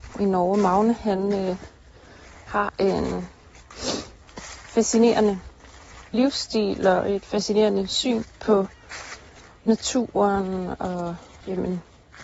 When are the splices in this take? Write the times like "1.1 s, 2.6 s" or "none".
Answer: 6.1 s